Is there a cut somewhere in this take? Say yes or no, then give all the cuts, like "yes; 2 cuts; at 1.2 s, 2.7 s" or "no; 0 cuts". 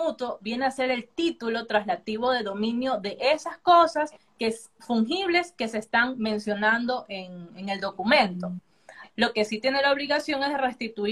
yes; 1 cut; at 9.1 s